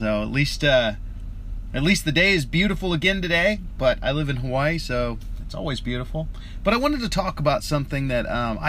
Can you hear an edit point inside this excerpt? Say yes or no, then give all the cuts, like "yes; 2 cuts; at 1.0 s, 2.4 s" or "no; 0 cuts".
no; 0 cuts